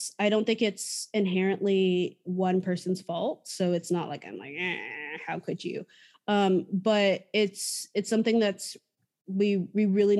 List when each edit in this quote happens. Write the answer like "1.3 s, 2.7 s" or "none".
none

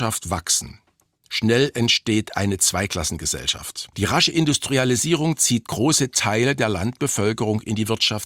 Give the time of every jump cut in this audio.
3.9 s

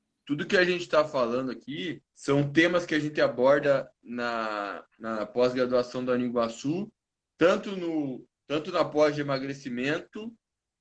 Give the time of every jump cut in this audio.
2.1 s

